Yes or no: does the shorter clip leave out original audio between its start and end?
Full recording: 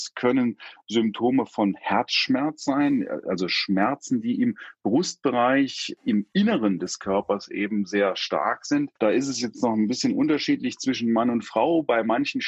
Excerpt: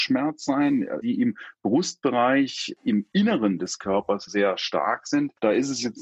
yes